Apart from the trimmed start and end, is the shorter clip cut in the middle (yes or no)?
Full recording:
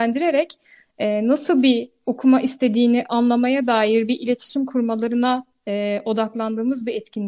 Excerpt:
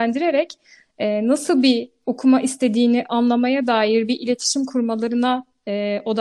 no